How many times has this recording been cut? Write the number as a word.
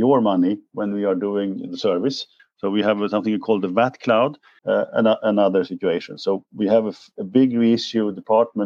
two